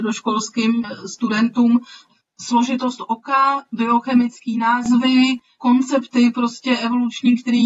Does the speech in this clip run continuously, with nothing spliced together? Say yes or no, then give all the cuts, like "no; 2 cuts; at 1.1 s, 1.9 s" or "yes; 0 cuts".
yes; 0 cuts